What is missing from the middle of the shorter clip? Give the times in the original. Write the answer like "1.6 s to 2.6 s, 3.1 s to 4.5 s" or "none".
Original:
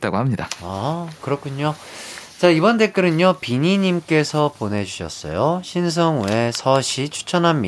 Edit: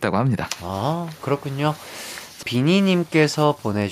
2.4 s to 3.4 s